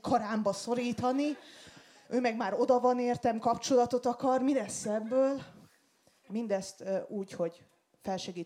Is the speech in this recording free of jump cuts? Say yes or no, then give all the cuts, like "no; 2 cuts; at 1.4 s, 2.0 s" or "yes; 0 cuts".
yes; 0 cuts